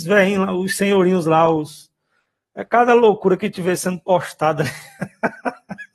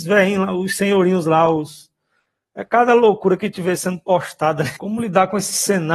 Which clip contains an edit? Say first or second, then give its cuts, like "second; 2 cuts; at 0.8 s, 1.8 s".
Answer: second; 1 cut; at 4.8 s